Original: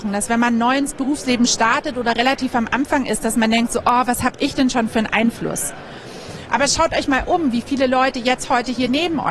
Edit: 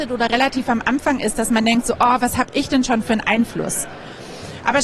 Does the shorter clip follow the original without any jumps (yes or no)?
yes